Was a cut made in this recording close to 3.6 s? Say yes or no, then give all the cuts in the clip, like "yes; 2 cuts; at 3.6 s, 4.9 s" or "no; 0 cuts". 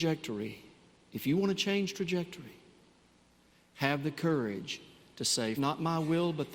no; 1 cut; at 5.6 s